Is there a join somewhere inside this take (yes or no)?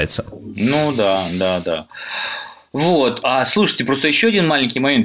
no